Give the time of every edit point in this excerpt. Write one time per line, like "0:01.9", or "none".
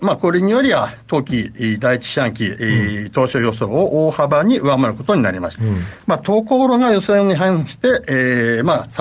0:05.6